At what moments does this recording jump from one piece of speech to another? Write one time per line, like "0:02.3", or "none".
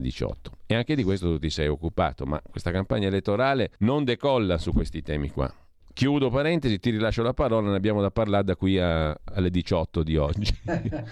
0:03.8